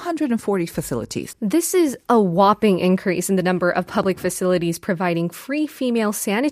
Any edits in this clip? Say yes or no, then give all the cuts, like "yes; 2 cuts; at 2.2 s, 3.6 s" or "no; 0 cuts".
yes; 1 cut; at 1.3 s